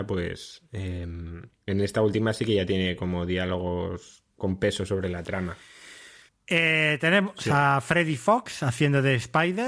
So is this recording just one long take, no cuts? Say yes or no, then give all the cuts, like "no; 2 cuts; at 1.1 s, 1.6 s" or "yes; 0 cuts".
no; 1 cut; at 6.3 s